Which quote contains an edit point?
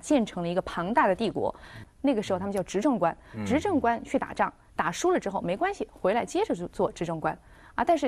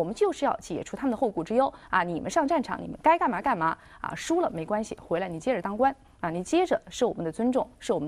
first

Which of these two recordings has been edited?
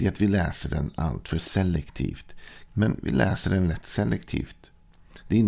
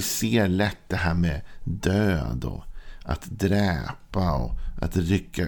first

